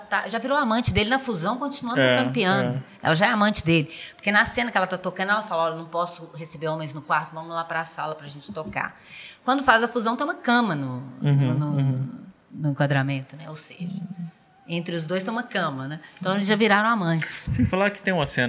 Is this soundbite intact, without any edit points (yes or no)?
yes